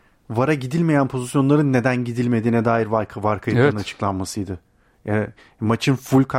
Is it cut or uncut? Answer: uncut